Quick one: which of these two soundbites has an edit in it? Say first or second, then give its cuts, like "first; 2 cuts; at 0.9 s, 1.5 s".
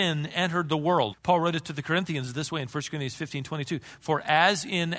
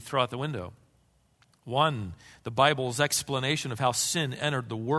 first; 1 cut; at 1.1 s